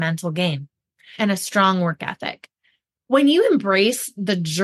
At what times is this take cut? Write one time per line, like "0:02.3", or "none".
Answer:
0:01.2